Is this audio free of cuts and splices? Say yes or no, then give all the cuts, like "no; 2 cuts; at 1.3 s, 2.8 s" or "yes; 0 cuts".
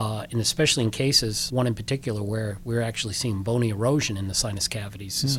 no; 1 cut; at 1.5 s